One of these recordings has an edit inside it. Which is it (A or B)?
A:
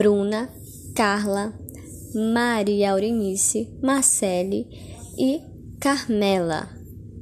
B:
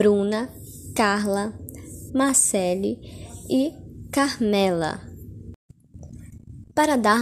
B